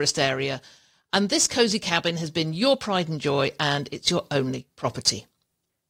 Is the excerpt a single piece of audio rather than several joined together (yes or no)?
yes